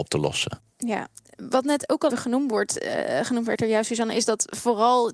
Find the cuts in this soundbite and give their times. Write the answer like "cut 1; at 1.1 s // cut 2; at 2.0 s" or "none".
cut 1; at 2.1 s